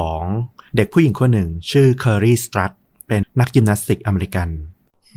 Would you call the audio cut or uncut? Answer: cut